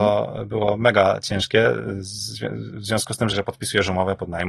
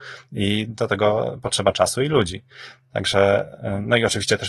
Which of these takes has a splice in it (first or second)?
first